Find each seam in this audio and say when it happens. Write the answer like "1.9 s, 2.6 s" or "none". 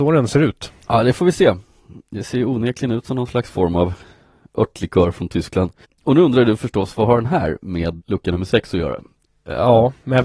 8.0 s